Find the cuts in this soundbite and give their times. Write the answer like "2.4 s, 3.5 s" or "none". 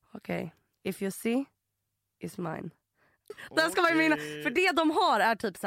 3.3 s